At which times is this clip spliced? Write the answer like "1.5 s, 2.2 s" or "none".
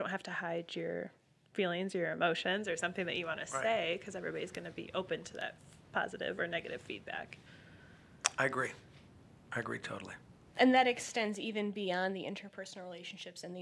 none